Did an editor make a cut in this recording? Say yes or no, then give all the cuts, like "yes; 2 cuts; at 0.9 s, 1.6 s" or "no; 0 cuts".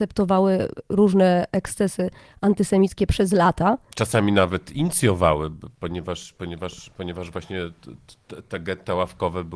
no; 0 cuts